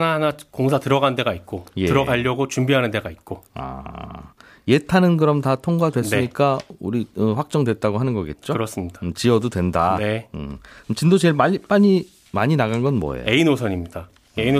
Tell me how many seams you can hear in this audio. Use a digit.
0